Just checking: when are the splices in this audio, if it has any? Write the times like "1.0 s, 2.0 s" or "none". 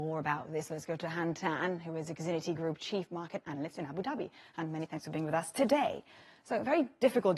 none